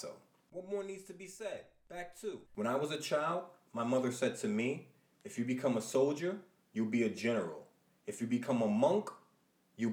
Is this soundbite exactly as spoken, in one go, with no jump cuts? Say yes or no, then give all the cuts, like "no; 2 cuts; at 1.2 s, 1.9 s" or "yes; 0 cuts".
no; 1 cut; at 2.5 s